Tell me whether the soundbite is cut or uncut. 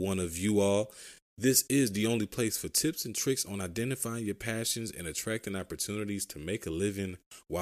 uncut